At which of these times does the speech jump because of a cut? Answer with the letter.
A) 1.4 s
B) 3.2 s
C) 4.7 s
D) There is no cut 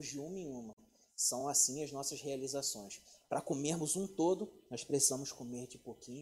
D